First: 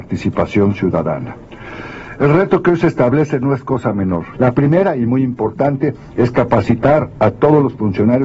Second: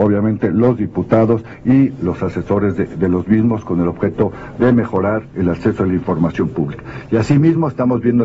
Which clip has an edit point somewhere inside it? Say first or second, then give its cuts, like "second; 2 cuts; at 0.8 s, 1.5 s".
first; 1 cut; at 4.3 s